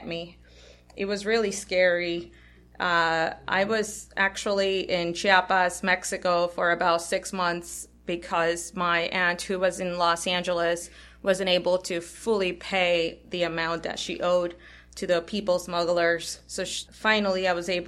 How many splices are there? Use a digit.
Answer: 1